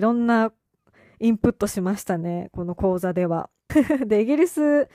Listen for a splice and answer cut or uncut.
cut